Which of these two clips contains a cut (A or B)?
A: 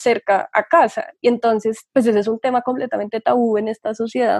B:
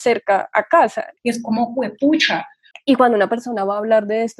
B